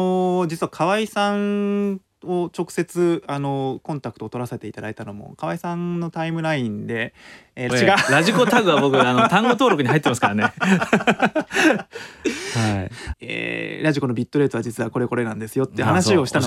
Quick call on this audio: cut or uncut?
cut